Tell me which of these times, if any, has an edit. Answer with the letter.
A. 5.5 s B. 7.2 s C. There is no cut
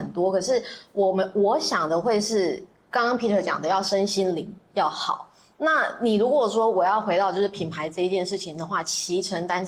A